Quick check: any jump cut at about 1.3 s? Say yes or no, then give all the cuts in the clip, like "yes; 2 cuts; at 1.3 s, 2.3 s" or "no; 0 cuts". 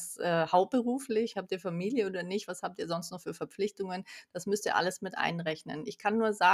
yes; 1 cut; at 1.3 s